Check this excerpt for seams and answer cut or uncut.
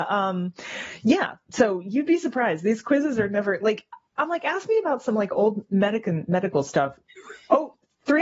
uncut